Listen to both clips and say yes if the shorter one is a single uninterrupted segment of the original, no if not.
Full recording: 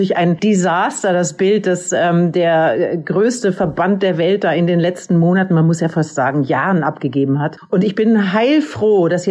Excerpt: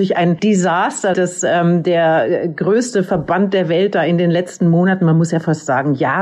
no